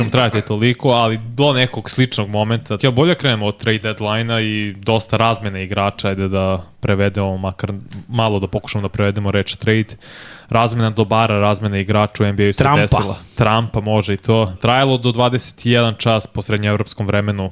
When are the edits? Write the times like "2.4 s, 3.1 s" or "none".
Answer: 2.8 s, 14.6 s